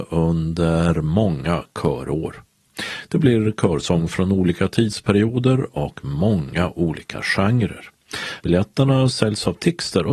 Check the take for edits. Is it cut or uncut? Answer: cut